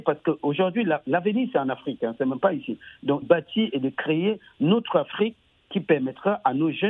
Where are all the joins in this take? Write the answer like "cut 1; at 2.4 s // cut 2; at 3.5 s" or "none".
cut 1; at 3.2 s